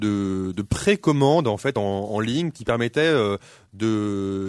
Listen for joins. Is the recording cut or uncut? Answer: uncut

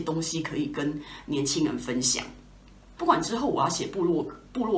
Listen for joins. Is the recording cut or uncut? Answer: cut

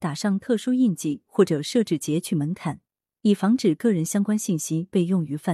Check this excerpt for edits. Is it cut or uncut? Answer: uncut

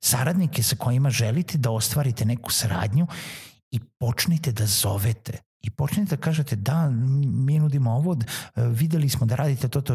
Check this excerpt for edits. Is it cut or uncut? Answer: cut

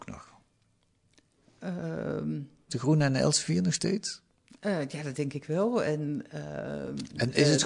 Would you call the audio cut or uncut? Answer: cut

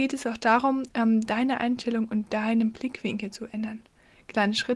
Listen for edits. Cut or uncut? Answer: uncut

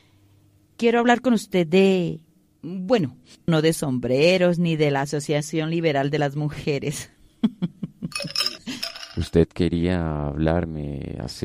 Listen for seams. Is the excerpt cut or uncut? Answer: cut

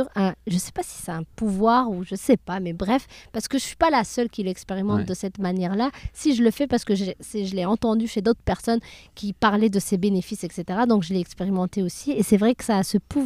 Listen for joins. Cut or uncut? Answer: uncut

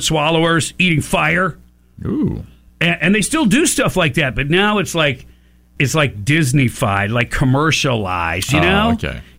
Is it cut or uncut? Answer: cut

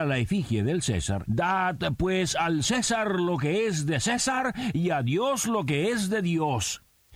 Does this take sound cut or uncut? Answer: cut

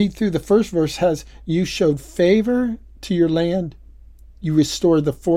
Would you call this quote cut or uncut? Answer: uncut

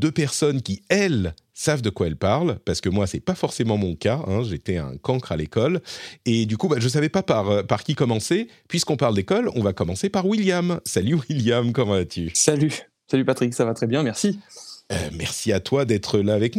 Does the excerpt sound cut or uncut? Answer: uncut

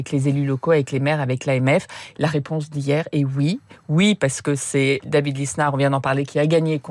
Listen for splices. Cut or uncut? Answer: uncut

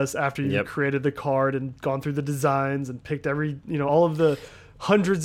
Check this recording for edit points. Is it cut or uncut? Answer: uncut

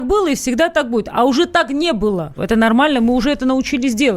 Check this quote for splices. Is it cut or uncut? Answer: cut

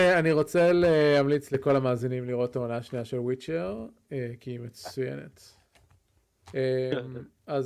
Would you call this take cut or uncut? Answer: cut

